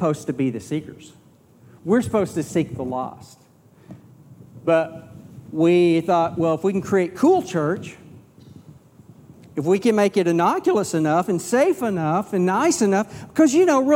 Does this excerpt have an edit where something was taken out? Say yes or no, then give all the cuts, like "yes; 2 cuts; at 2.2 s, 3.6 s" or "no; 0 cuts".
no; 0 cuts